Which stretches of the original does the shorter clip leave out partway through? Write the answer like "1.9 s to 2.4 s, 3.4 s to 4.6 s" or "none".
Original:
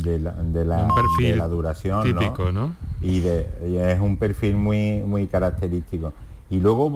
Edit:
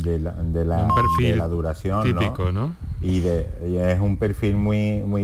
none